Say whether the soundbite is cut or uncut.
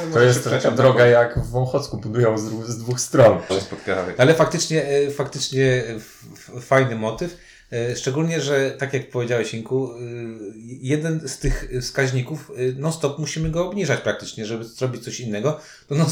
cut